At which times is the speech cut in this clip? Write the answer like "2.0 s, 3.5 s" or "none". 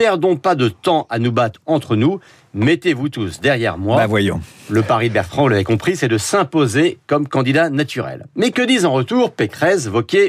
none